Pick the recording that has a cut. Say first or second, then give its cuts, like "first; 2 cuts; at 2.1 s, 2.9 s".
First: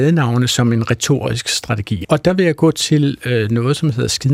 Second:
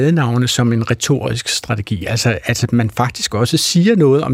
first; 1 cut; at 2.0 s